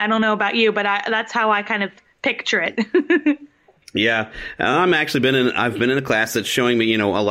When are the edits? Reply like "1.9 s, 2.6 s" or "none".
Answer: none